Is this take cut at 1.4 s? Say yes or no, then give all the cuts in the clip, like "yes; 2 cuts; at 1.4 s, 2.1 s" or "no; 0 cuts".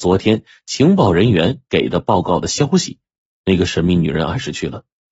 no; 1 cut; at 3.4 s